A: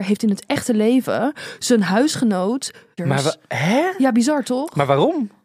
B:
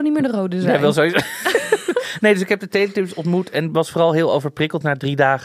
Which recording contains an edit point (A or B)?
A